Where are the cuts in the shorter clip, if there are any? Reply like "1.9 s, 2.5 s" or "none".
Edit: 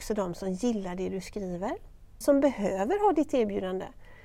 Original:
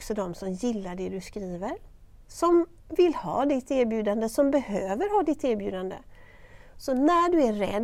2.2 s